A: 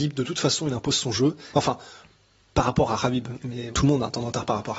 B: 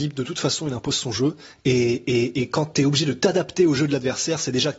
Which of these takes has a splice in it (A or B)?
A